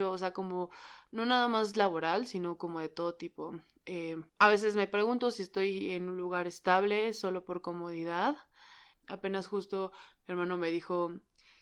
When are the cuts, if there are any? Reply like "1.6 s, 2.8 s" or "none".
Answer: 4.3 s, 8.9 s